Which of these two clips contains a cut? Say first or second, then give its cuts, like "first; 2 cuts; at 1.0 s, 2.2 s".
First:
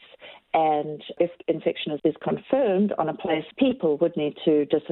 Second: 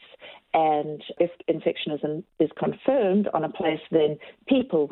first; 2 cuts; at 2.0 s, 3.5 s